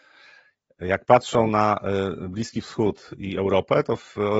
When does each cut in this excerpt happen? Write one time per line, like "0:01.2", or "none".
none